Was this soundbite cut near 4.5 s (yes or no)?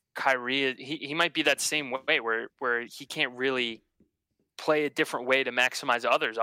no